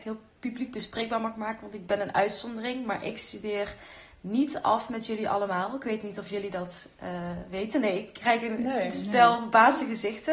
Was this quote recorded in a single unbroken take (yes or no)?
yes